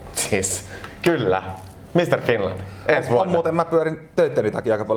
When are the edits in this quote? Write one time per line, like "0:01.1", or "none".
none